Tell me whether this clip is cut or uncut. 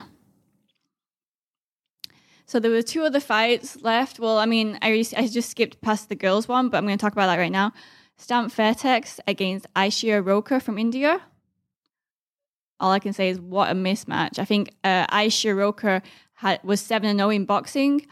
uncut